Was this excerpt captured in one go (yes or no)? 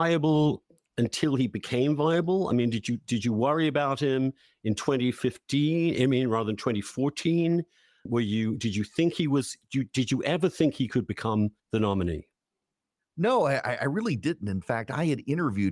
no